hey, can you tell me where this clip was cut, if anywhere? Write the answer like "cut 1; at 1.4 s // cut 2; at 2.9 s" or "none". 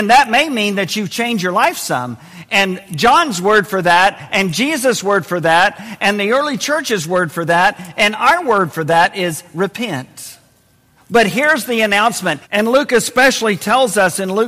cut 1; at 11.0 s // cut 2; at 12.4 s